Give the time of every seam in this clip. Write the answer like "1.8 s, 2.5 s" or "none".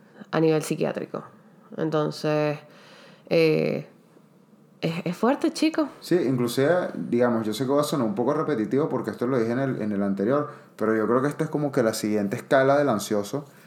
none